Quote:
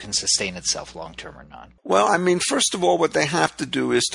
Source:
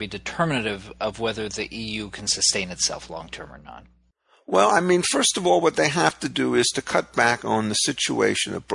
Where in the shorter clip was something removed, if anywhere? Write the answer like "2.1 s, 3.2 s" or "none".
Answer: 1.8 s